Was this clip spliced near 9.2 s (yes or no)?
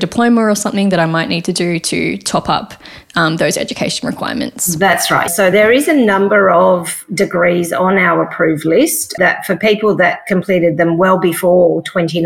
yes